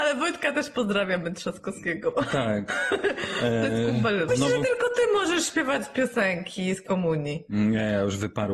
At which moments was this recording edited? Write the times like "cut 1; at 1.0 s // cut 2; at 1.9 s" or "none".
cut 1; at 4.3 s

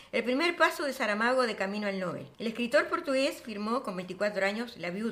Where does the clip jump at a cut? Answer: cut 1; at 2.3 s

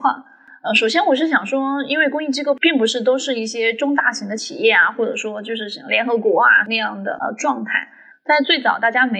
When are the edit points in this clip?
cut 1; at 8.1 s

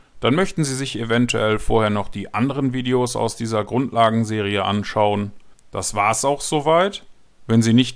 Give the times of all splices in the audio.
cut 1; at 5.5 s

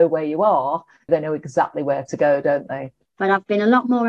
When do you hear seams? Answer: cut 1; at 1.1 s // cut 2; at 3.1 s

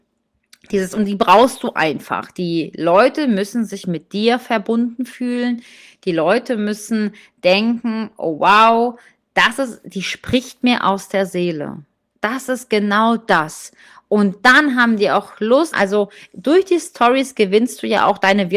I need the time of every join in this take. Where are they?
cut 1; at 15.7 s

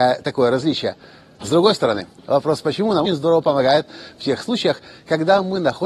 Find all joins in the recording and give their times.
cut 1; at 1.4 s // cut 2; at 3.1 s

